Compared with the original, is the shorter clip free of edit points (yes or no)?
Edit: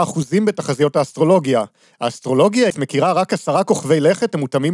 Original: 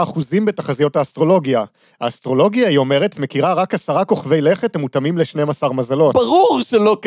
no